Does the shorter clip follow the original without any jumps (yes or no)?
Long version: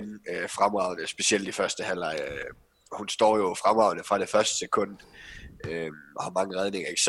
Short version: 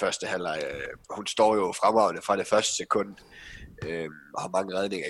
no